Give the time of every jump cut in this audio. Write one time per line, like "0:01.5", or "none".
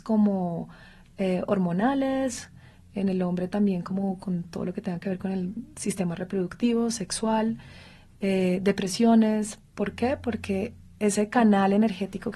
none